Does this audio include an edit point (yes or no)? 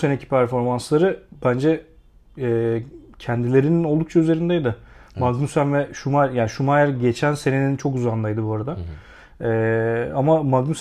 no